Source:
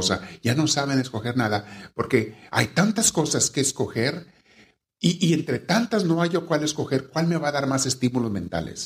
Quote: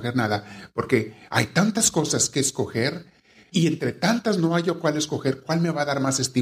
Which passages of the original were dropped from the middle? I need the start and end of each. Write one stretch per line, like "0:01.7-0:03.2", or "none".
0:04.7-0:05.2